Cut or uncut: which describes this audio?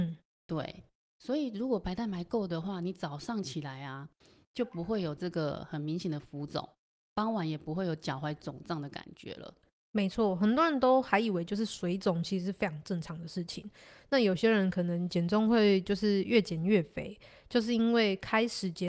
uncut